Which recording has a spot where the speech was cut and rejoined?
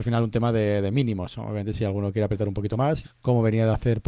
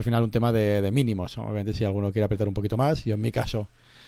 first; 1 cut; at 3.0 s

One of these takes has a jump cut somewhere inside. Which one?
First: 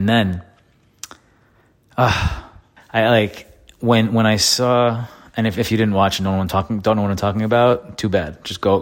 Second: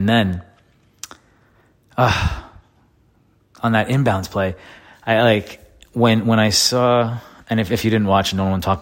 first; 1 cut; at 2.8 s

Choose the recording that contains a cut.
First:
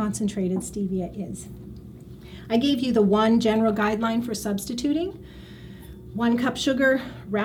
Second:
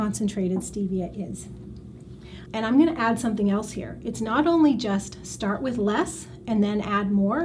second; 1 cut; at 2.5 s

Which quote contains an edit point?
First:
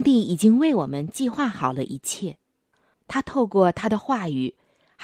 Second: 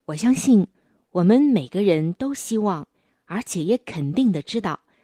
first; 1 cut; at 2.9 s

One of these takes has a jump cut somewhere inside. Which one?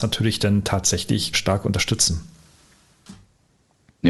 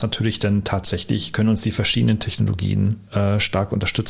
first; 1 cut; at 1.3 s

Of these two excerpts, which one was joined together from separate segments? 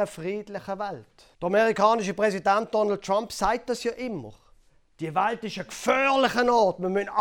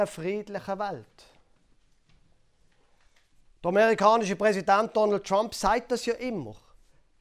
first; 1 cut; at 1.3 s

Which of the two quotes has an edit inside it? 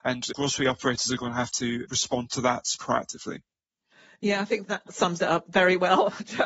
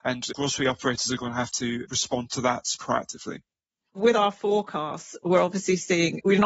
second; 1 cut; at 3.9 s

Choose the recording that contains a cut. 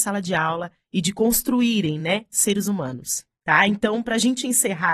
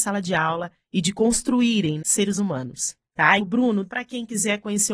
second; 2 cuts; at 2.0 s, 3.4 s

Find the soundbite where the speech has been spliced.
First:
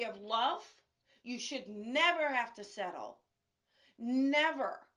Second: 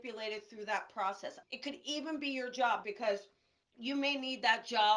second; 2 cuts; at 1.4 s, 2.8 s

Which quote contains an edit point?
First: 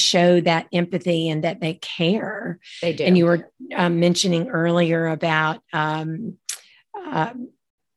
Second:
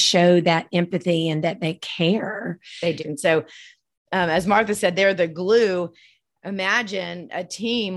second; 1 cut; at 3.0 s

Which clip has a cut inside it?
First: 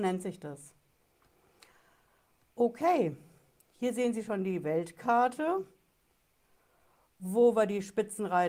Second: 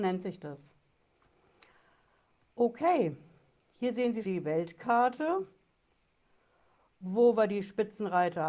second; 1 cut; at 4.2 s

